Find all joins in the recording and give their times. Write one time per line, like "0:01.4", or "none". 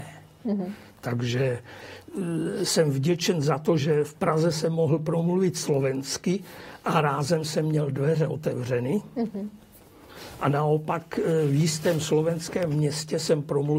none